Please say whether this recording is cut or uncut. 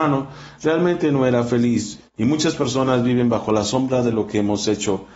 cut